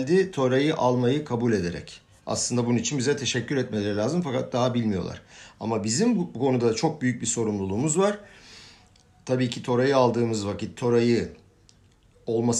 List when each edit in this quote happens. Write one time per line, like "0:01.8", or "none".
none

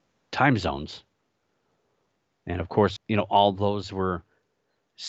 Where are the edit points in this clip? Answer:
0:03.0

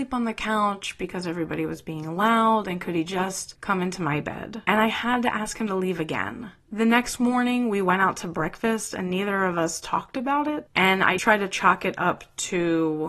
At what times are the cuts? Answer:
0:11.2

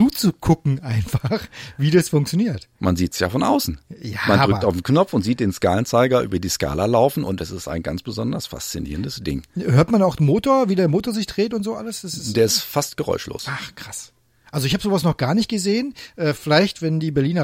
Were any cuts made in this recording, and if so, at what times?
none

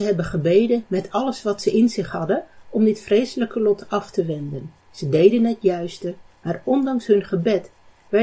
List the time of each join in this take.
0:04.8
0:06.3

